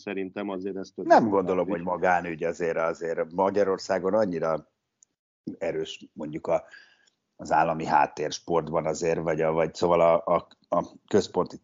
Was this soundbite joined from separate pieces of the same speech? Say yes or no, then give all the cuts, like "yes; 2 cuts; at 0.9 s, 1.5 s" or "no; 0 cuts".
no; 0 cuts